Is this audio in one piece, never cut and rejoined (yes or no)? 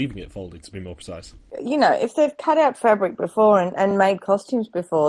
yes